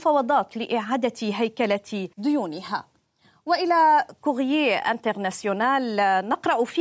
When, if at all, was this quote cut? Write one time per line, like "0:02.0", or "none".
0:02.1